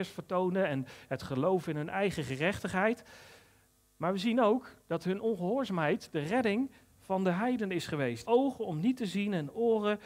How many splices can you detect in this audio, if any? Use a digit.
2